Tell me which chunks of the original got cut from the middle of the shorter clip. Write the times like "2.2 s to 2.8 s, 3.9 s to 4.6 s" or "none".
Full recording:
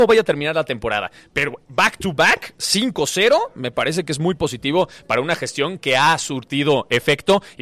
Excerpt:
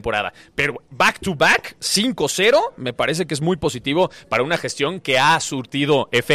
none